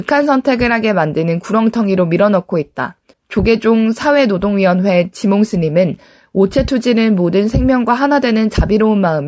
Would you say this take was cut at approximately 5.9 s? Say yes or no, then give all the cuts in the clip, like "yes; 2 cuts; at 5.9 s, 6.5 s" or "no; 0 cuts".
no; 1 cut; at 3.1 s